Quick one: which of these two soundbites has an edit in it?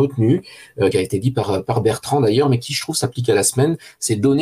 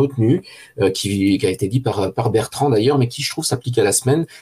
first; 1 cut; at 0.9 s

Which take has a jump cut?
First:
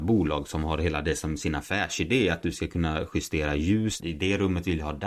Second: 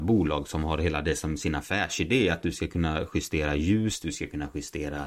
first; 1 cut; at 4.0 s

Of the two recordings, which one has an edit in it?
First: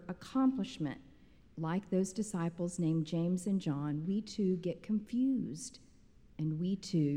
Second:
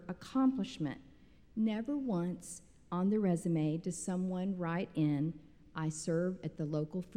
first; 1 cut; at 1.4 s

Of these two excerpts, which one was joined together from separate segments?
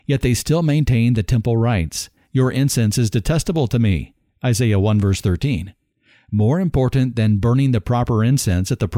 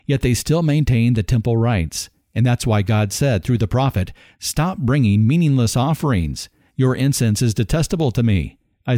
first; 1 cut; at 2.2 s

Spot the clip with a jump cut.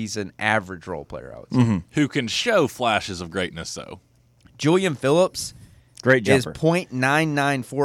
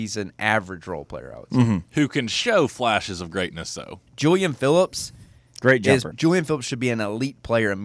second; 2 cuts; at 4.1 s, 6.1 s

